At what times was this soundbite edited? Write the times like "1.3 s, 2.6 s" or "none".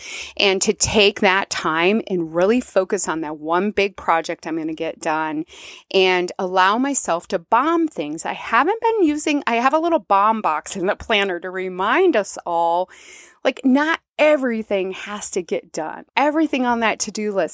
16.1 s